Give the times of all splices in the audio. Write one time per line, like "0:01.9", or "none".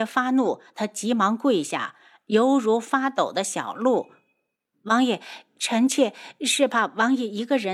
none